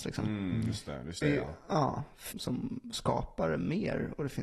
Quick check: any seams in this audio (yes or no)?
yes